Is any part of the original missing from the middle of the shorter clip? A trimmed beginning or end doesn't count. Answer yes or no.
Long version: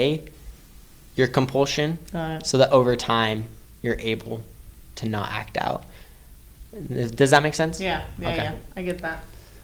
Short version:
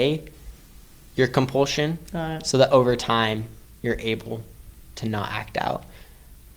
no